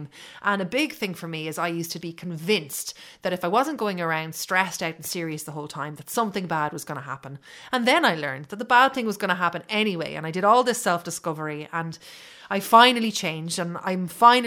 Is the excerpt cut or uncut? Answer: cut